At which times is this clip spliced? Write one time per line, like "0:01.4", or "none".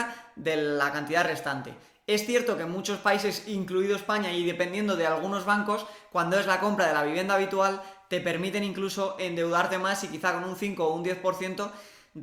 none